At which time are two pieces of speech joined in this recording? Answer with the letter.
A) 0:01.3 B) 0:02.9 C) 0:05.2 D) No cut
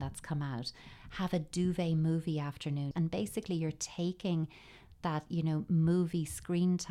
B